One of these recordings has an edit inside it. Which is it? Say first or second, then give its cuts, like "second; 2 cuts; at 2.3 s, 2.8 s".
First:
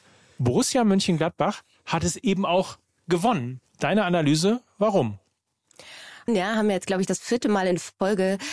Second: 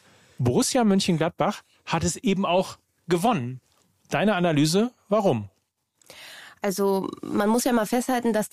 first; 2 cuts; at 3.7 s, 6.3 s